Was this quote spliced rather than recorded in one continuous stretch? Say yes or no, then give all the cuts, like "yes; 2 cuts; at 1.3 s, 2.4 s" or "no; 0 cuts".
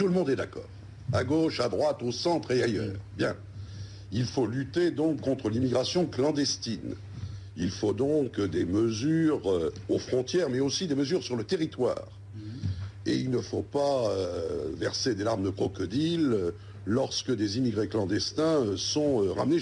no; 0 cuts